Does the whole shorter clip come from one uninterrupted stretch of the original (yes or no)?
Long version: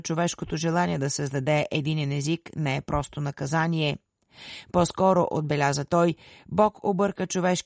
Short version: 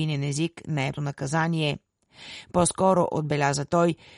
no